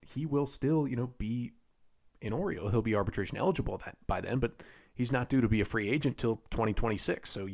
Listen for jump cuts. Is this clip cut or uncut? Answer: uncut